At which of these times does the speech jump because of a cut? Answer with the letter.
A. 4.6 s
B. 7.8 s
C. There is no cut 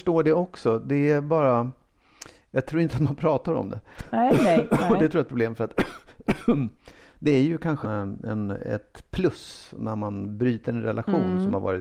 B